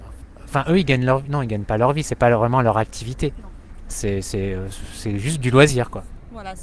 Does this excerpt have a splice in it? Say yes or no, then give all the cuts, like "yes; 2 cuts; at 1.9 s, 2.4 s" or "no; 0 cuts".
no; 0 cuts